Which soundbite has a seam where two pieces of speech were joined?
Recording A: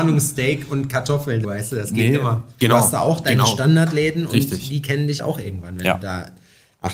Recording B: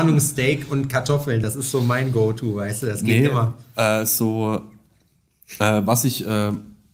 A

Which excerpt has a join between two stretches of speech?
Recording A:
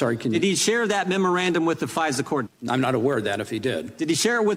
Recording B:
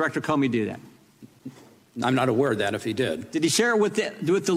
A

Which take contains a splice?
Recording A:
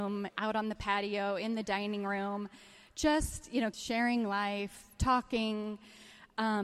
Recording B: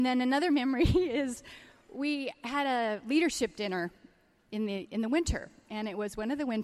A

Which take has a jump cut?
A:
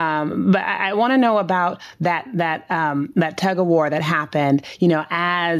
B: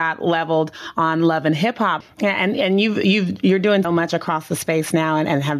B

